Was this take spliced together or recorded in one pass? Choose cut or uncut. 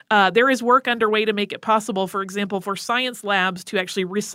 uncut